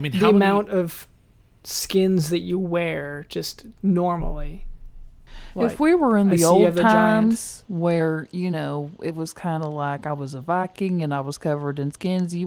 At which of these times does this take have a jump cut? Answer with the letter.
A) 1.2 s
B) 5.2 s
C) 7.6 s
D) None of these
C